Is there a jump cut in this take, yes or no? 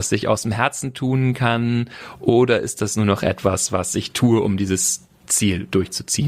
no